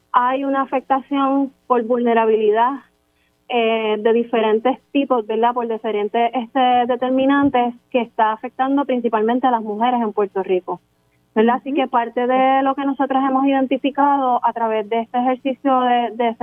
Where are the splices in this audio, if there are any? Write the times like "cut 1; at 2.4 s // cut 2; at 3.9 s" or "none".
none

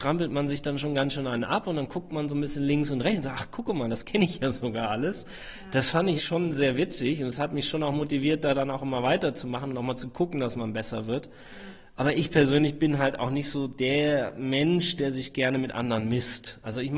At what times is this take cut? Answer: cut 1; at 6.2 s

